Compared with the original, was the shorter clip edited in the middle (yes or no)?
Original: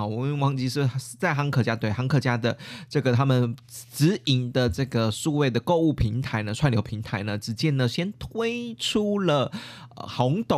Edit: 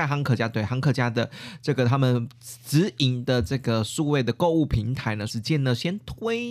yes